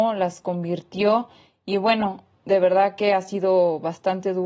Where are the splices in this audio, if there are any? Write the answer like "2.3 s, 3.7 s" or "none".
none